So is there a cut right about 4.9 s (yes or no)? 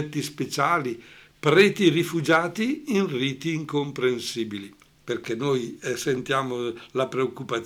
yes